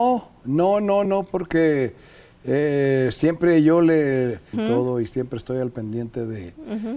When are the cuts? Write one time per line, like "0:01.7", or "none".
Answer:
0:01.1
0:04.5